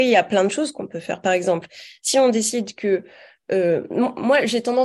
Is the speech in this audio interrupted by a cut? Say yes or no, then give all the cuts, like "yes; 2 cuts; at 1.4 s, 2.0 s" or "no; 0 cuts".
no; 0 cuts